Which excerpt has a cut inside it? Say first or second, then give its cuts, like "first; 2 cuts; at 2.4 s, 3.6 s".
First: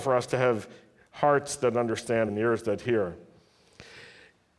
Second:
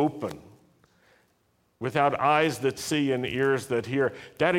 first; 1 cut; at 2.3 s